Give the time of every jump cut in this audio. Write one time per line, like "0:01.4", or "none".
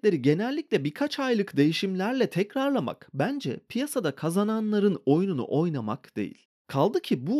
none